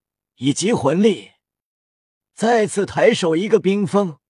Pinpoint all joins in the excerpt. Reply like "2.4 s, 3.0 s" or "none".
2.2 s